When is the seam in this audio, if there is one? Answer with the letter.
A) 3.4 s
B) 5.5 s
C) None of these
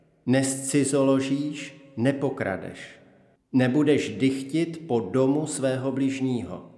A